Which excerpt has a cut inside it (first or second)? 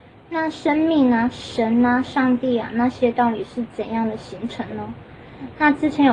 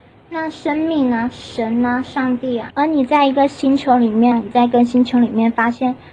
second